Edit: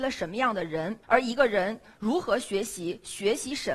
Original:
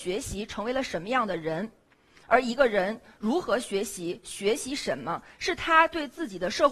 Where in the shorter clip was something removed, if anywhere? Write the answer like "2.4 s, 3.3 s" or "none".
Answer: 1.0 s